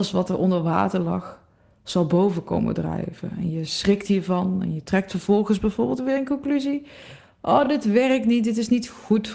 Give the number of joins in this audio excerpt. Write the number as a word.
zero